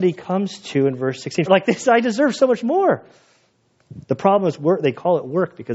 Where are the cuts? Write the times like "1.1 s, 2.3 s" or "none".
1.4 s